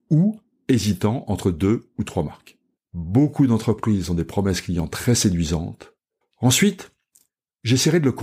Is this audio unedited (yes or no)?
no